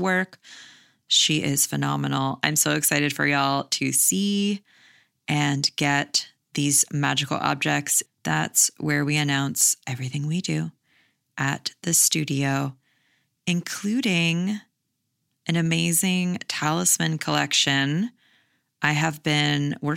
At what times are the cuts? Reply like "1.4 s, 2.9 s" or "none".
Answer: 8.1 s

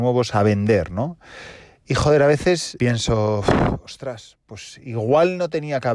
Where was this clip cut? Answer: 2.8 s

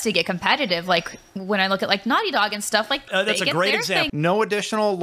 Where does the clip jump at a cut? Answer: 3.1 s, 4.1 s

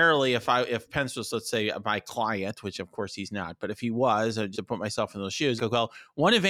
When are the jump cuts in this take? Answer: 4.5 s, 5.6 s

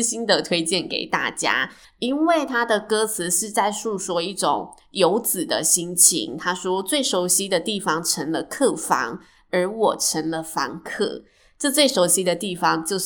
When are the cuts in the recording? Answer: 1.8 s

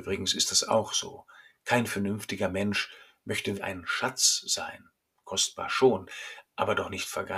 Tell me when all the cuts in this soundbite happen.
3.5 s

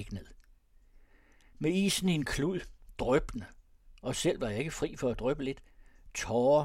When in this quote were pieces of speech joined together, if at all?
1.5 s

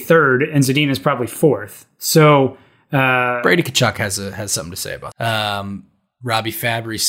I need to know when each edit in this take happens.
5.1 s

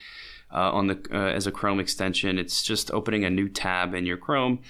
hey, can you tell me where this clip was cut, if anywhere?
none

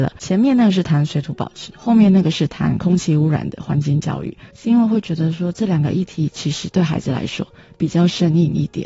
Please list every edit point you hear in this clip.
4.5 s

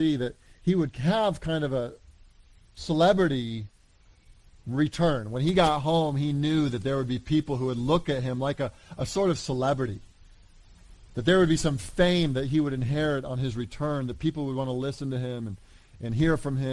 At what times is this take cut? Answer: none

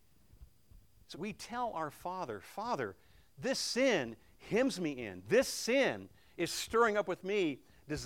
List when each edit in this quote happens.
1.1 s, 5.3 s

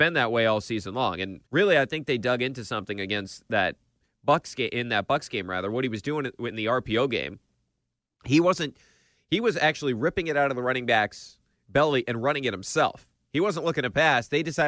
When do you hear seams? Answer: 1.5 s

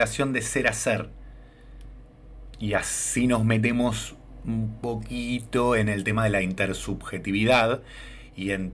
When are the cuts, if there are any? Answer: 2.5 s

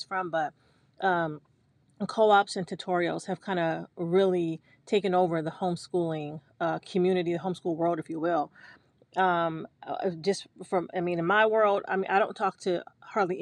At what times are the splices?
none

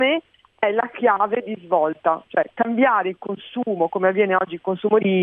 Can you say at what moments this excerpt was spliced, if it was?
none

